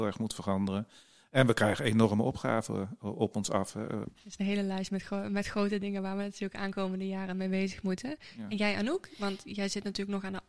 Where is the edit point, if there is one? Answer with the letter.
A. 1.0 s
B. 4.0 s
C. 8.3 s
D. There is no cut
B